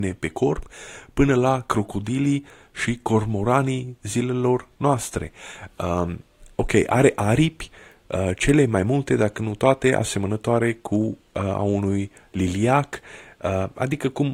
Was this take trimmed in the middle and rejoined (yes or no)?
no